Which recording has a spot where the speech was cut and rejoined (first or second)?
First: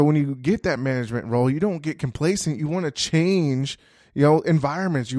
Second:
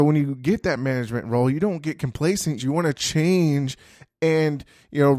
second